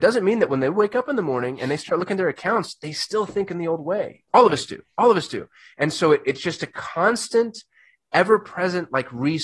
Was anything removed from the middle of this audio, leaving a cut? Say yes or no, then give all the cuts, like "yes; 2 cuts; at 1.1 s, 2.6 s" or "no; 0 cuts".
no; 0 cuts